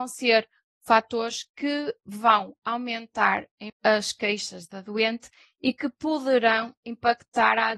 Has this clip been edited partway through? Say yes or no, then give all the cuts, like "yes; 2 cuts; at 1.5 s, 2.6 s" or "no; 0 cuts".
yes; 1 cut; at 3.7 s